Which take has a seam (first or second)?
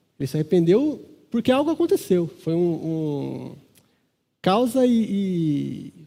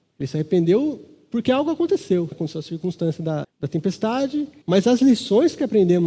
second